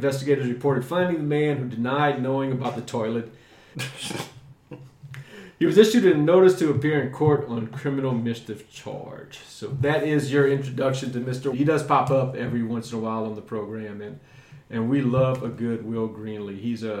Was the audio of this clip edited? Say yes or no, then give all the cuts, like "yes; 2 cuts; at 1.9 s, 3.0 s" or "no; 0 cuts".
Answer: yes; 2 cuts; at 3.7 s, 11.5 s